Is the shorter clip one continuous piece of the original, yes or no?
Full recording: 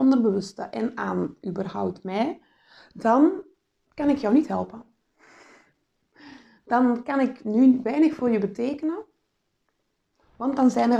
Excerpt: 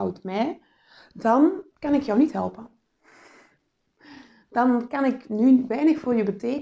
no